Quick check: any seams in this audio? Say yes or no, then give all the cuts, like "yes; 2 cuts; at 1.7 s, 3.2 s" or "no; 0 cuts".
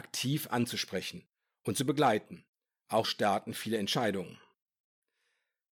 yes; 1 cut; at 3.0 s